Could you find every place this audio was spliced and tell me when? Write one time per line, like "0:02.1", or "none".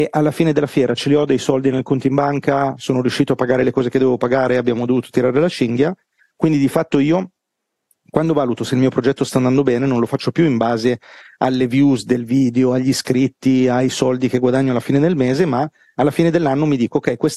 0:06.2